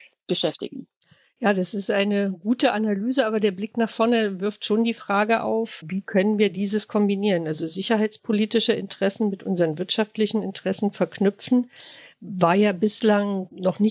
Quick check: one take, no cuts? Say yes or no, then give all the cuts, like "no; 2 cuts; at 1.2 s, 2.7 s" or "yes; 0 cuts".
yes; 0 cuts